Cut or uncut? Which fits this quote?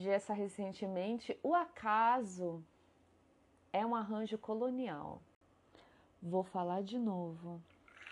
uncut